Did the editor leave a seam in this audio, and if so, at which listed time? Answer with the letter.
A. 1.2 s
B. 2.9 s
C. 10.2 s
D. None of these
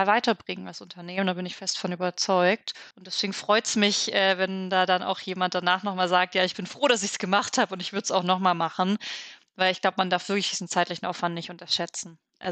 B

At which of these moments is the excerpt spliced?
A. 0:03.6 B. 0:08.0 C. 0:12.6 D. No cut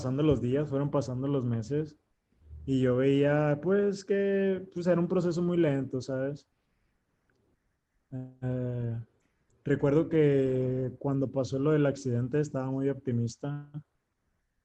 B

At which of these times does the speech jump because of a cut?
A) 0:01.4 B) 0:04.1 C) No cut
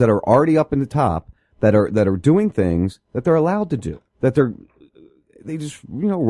B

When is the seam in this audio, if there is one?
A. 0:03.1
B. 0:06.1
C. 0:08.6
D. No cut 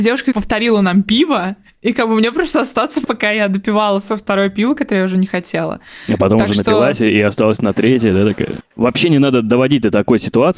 C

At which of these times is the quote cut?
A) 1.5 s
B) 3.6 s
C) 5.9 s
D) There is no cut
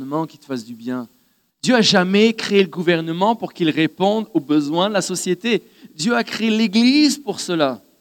A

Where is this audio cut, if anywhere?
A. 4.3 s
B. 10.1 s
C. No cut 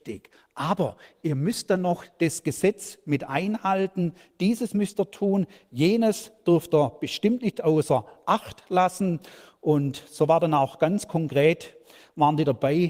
C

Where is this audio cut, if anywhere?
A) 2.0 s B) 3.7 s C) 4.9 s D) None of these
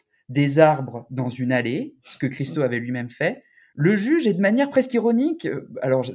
D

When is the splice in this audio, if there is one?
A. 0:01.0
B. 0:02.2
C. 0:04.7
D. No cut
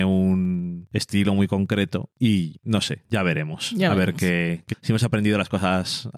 C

